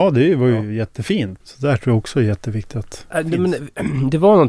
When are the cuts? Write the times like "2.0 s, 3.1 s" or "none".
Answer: 1.4 s, 3.1 s